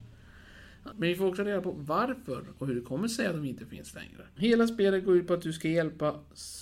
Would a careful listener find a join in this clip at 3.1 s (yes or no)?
no